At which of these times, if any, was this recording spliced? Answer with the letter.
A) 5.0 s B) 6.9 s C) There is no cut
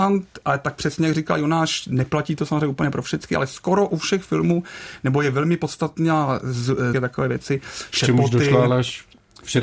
B